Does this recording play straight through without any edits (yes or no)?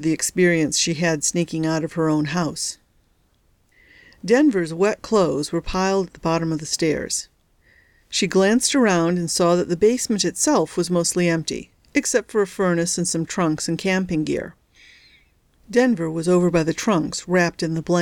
yes